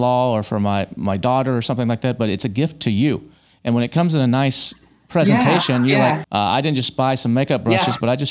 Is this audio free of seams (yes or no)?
no